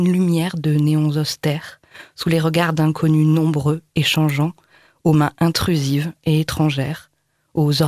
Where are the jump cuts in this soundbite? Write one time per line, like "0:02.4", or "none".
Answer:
none